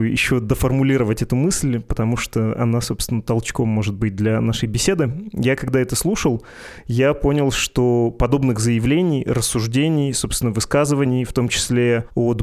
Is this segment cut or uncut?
uncut